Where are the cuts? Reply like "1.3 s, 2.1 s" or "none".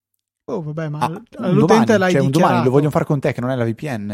1.3 s